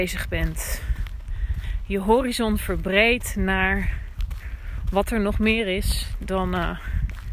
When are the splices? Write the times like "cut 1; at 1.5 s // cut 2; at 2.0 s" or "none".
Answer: none